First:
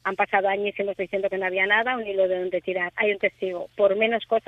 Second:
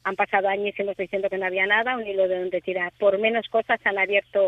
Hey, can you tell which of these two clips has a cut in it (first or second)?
second